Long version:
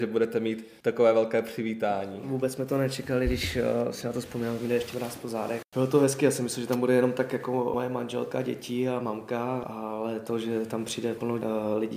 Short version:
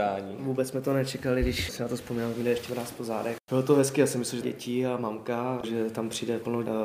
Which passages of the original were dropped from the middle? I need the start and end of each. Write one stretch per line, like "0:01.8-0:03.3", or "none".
0:03.5-0:03.9
0:06.7-0:08.4
0:09.7-0:10.4

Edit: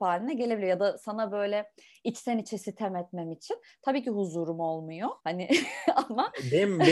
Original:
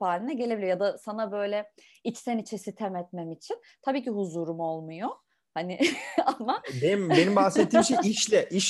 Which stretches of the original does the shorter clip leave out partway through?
0:05.2-0:05.5

